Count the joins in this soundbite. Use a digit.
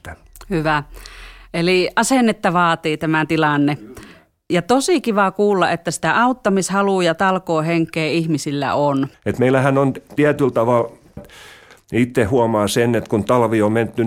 2